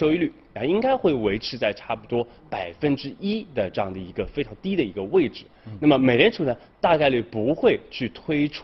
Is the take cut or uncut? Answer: uncut